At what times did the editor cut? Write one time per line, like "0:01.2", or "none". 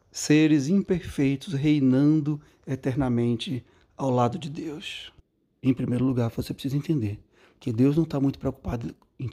none